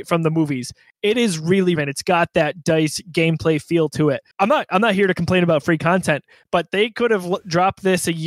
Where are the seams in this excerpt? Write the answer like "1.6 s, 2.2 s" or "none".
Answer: 1.8 s, 4.3 s